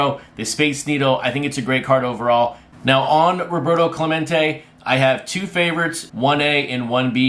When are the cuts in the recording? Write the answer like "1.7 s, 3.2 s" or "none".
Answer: 6.1 s

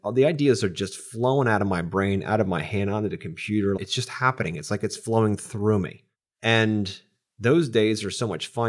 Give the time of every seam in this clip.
3.8 s

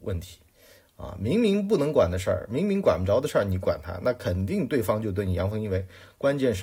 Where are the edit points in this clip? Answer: none

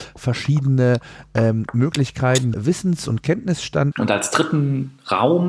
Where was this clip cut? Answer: 2.5 s, 3.9 s

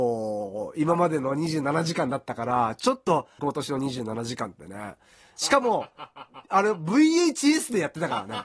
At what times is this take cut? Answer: 3.4 s, 5.4 s

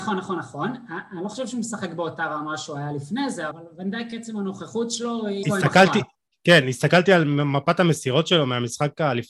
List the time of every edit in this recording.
3.5 s, 5.4 s

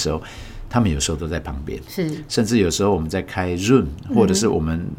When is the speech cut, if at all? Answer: none

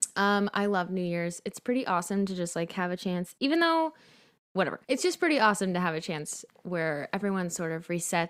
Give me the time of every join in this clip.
4.8 s

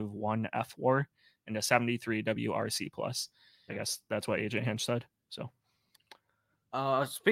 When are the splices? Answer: 3.7 s

